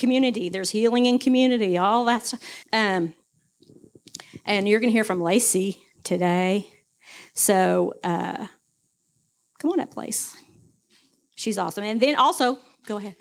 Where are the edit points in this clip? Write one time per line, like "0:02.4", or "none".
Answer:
0:02.6